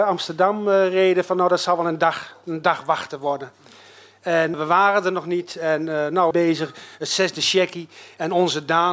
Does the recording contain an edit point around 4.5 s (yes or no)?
yes